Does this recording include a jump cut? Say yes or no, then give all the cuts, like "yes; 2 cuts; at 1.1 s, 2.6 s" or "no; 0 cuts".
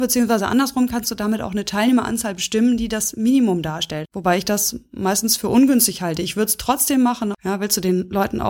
yes; 2 cuts; at 4.0 s, 7.3 s